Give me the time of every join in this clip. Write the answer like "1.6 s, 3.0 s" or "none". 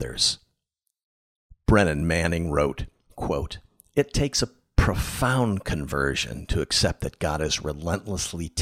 none